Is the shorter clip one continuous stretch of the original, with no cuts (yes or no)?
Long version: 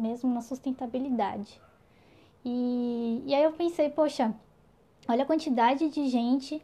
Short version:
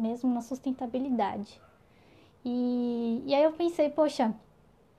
yes